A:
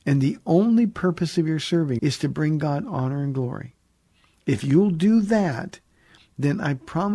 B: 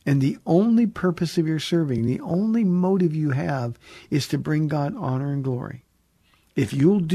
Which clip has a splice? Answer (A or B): A